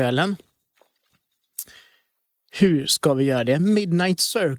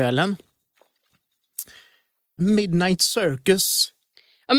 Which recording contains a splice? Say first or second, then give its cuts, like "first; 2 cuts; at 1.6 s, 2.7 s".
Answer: second; 1 cut; at 2.4 s